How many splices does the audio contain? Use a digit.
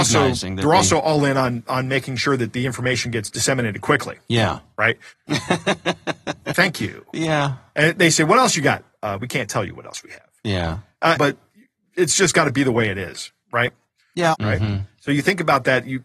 3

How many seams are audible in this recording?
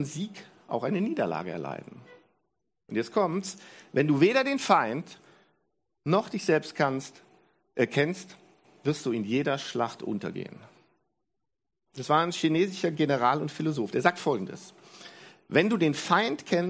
1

